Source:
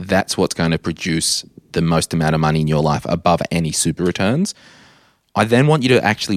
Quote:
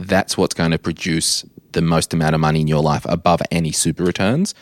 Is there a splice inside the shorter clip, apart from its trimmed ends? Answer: no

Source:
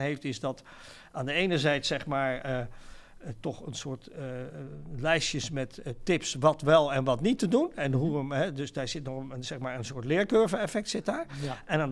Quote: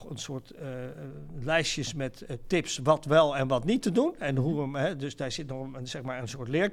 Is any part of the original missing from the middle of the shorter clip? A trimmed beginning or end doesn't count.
no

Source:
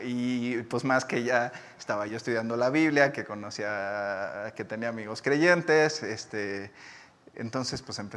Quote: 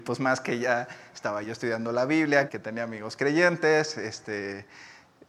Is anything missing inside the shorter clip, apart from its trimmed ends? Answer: yes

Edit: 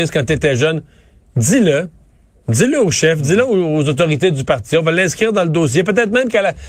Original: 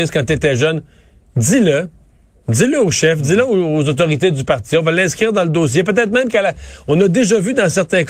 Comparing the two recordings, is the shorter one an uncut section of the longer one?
yes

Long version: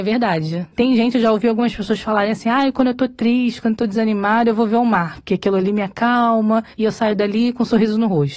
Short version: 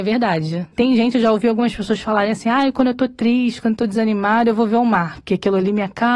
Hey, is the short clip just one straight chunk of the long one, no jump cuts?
yes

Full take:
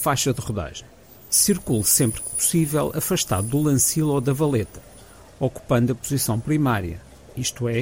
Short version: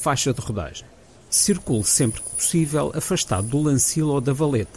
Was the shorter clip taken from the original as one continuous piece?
yes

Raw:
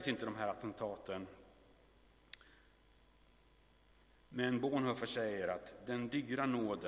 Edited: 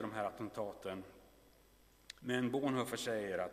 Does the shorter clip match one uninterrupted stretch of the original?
no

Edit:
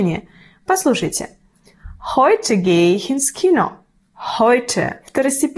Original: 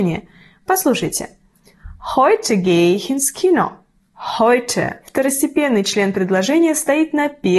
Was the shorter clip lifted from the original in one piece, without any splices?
yes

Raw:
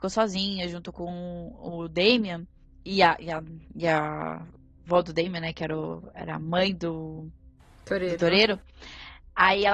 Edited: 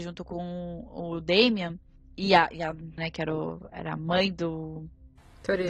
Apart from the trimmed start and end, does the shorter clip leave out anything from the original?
yes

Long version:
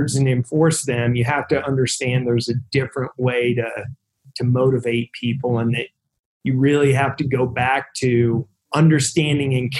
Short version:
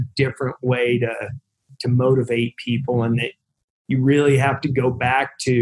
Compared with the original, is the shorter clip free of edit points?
yes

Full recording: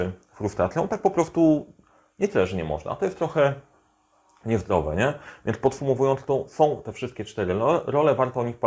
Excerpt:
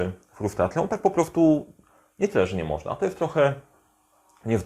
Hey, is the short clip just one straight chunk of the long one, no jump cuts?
yes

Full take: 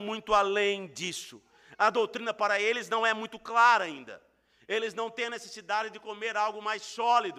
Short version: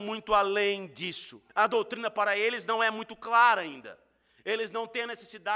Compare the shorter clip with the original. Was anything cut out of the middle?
yes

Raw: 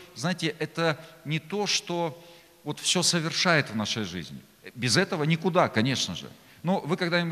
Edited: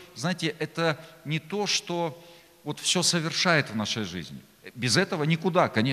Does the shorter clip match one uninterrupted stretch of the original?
yes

